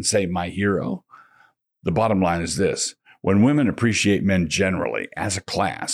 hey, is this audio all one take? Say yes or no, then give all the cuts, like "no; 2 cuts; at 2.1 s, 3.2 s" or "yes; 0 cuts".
yes; 0 cuts